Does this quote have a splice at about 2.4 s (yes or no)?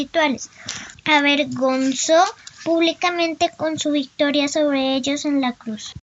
no